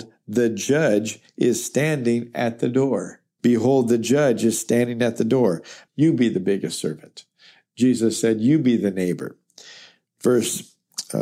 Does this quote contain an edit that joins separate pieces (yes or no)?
yes